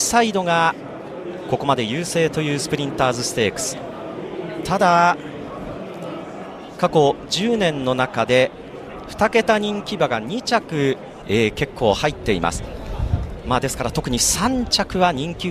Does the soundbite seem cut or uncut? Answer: cut